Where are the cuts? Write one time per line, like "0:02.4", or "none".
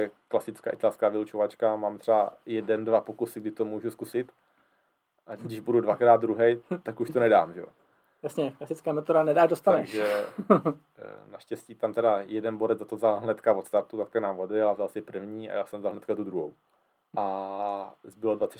0:05.4
0:17.1